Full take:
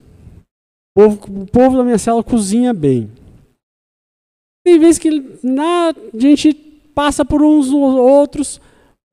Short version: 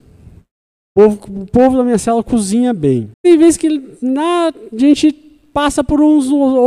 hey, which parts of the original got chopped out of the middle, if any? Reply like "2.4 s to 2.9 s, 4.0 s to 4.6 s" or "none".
3.1 s to 4.5 s